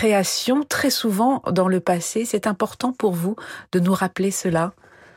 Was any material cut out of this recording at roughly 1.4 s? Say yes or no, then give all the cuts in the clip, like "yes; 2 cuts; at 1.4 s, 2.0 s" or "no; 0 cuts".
yes; 1 cut; at 1.4 s